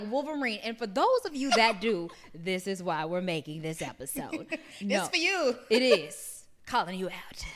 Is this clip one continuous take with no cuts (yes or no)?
yes